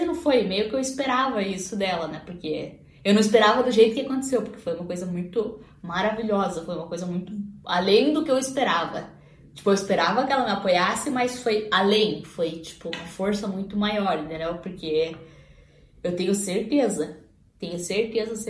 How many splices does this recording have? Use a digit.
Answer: 0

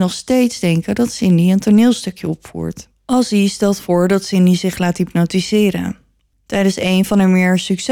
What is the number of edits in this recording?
2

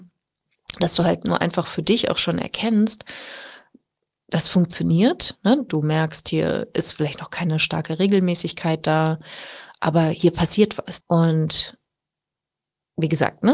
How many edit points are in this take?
2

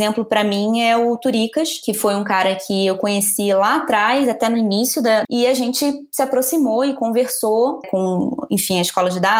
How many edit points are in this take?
2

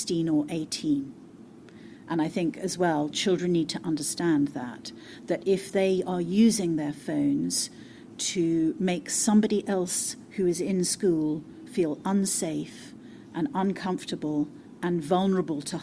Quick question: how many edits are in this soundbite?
1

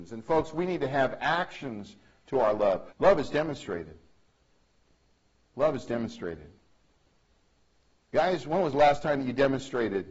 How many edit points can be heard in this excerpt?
1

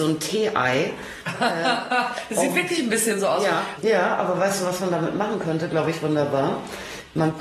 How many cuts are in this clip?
1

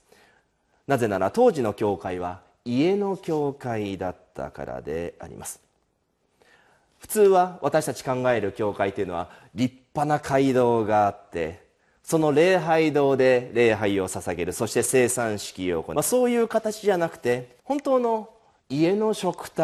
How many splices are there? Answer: 2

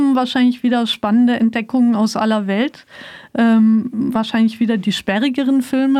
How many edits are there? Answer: 0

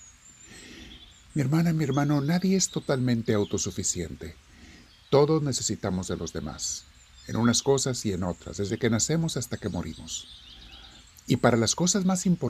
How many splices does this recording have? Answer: 0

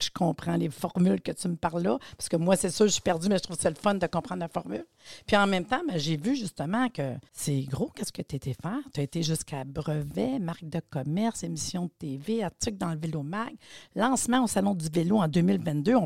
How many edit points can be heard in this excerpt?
1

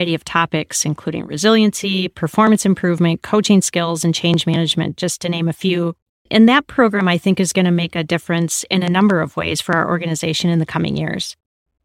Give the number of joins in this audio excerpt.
1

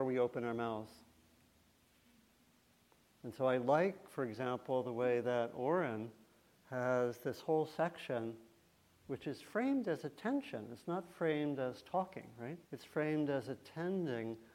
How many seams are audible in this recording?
1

